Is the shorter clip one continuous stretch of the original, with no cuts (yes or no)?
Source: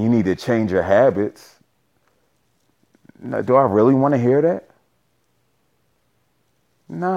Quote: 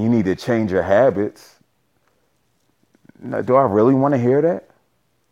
yes